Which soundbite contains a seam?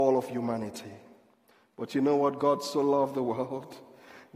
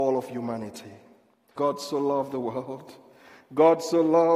second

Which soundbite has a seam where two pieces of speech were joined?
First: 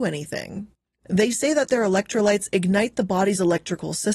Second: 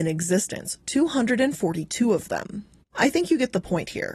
second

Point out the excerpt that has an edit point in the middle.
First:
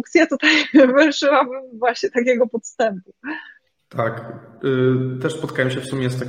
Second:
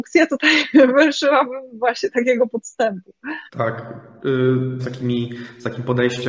second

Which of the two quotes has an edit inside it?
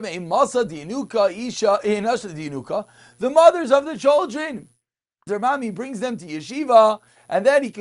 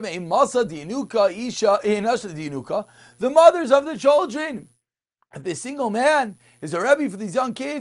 first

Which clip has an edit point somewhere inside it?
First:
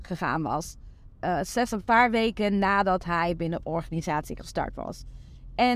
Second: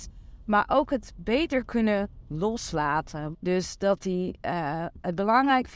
second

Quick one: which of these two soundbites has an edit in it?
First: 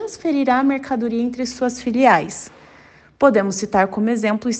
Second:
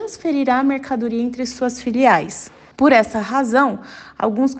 second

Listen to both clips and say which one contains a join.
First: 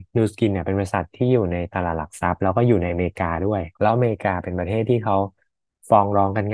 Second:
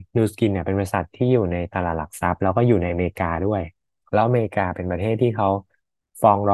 first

